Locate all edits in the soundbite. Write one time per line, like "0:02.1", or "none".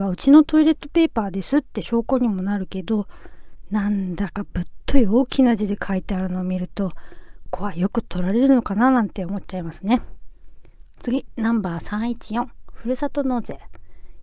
0:07.5